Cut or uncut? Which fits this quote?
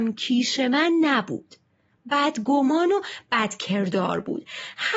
uncut